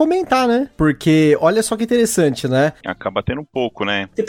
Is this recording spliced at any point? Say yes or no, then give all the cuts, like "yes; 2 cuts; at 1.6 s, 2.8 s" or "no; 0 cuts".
yes; 1 cut; at 2.8 s